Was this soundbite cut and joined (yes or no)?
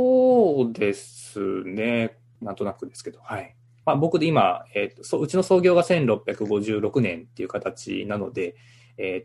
yes